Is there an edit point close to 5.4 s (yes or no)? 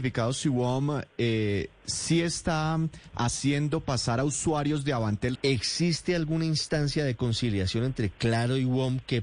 yes